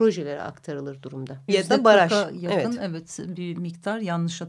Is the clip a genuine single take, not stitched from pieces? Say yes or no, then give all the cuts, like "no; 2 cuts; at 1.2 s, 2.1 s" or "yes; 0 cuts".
no; 1 cut; at 1.5 s